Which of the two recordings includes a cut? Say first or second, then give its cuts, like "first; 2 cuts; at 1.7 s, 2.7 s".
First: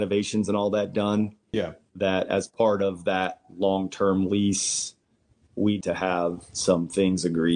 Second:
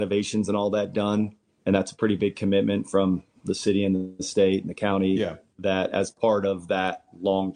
first; 2 cuts; at 1.5 s, 5.8 s